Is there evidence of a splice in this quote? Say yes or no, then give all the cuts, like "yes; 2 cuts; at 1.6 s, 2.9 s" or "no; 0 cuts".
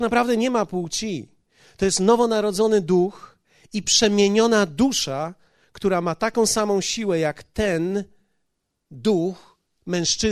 no; 0 cuts